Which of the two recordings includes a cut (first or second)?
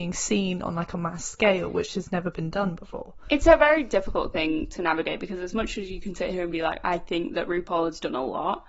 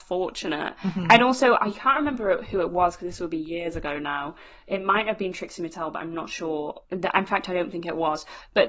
second